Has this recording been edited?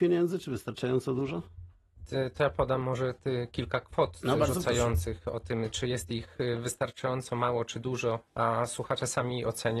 yes; 2 cuts; at 3.5 s, 8.3 s

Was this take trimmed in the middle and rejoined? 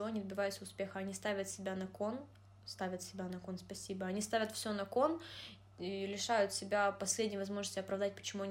no; 0 cuts

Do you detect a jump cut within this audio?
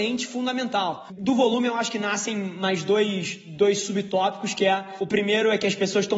no; 0 cuts

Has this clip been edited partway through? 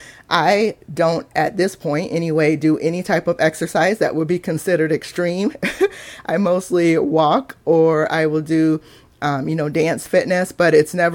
no; 0 cuts

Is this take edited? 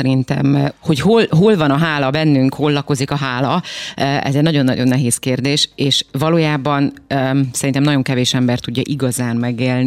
no; 0 cuts

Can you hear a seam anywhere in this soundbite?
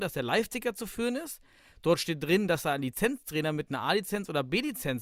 no; 0 cuts

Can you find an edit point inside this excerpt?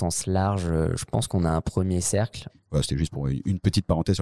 yes; 1 cut; at 2.5 s

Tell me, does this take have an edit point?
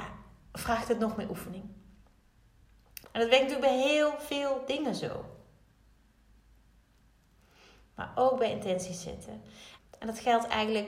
yes; 2 cuts; at 3.0 s, 9.8 s

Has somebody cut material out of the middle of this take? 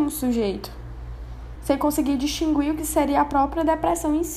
no; 0 cuts

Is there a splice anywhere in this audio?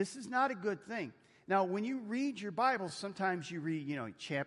no; 0 cuts

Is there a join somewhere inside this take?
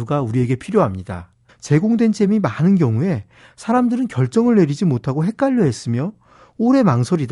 yes; 1 cut; at 1.5 s

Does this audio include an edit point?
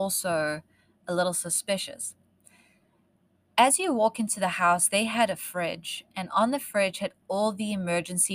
no; 0 cuts

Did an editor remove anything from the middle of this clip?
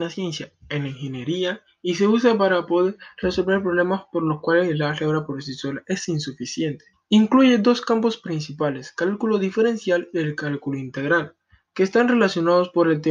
yes; 1 cut; at 6.9 s

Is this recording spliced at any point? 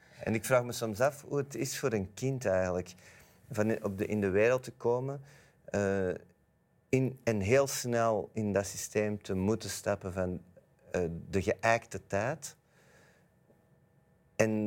no; 0 cuts

